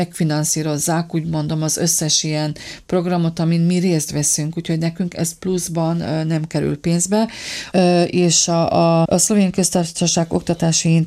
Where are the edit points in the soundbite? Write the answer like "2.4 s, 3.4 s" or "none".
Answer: 7.7 s, 9.0 s

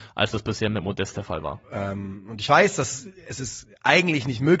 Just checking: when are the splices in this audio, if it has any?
1.6 s

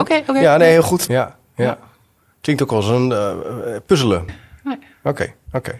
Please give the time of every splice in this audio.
1.1 s, 4.3 s

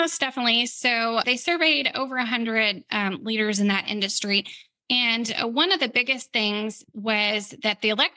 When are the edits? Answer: 1.2 s

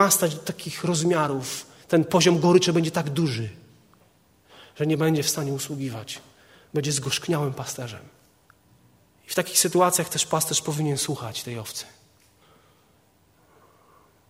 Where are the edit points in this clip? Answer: 9.2 s

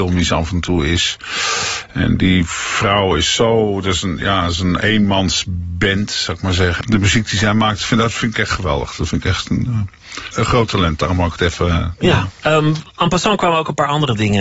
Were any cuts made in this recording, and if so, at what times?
6.8 s, 10.3 s, 12.4 s

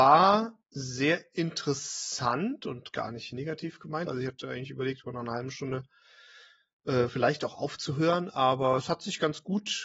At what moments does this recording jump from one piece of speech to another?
4.1 s

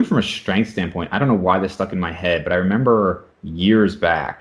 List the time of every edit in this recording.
3.3 s

